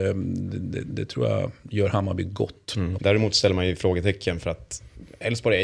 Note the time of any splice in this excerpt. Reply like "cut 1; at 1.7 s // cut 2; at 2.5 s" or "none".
cut 1; at 3.0 s